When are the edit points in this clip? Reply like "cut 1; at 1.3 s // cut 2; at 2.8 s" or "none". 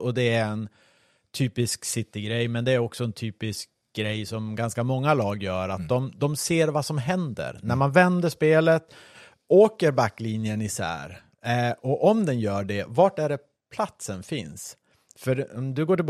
none